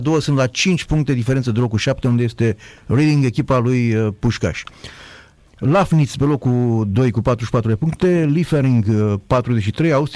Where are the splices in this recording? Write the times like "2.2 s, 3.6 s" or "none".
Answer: 5.5 s